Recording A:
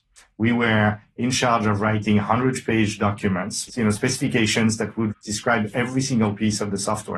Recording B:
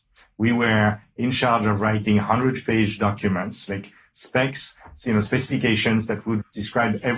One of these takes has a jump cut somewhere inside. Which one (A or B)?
A